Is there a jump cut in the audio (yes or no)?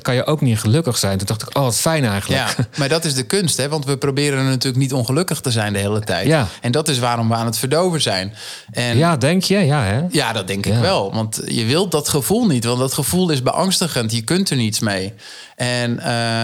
no